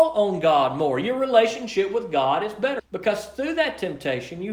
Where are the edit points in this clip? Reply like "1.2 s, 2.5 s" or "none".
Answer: 2.8 s

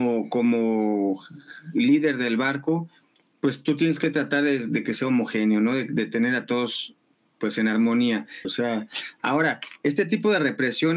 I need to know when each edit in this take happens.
8.4 s

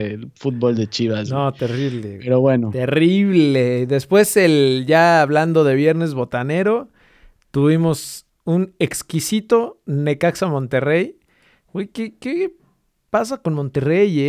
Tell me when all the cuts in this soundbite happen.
none

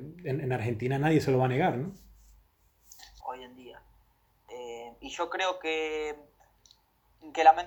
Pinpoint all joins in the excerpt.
3.2 s

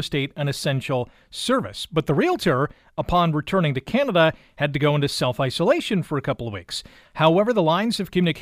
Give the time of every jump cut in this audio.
none

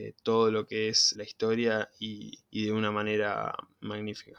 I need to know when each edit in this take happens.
1.1 s, 2.4 s

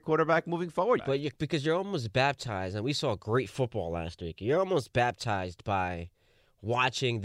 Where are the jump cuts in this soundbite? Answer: 1.0 s

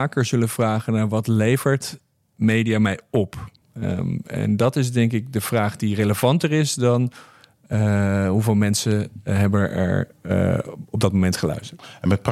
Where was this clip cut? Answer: 3.6 s

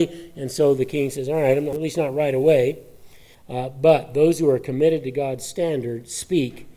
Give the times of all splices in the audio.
1.7 s, 3.3 s

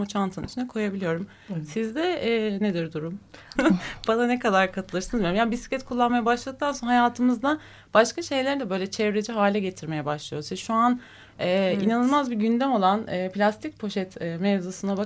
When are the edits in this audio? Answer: 3.6 s

